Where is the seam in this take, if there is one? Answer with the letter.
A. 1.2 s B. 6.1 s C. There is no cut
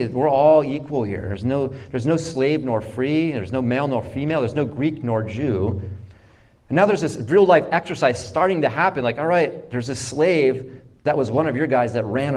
C